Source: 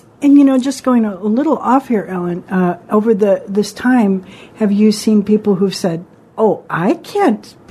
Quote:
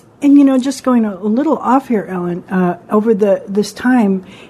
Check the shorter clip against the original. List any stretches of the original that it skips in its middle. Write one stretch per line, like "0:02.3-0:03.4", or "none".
none